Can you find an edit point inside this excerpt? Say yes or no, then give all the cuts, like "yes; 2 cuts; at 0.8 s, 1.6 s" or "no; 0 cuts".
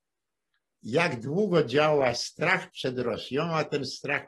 no; 0 cuts